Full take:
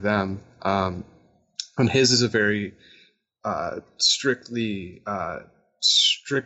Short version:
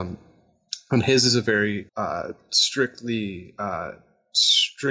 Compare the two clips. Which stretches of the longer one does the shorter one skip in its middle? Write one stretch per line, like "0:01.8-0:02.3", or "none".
0:02.8-0:03.4